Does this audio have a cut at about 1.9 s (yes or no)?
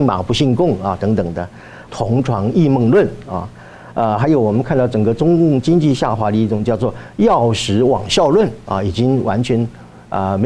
yes